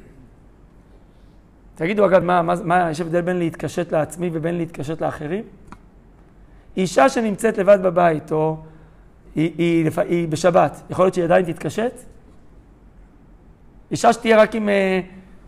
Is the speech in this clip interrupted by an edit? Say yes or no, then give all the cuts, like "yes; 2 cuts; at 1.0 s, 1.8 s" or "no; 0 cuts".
yes; 1 cut; at 2.2 s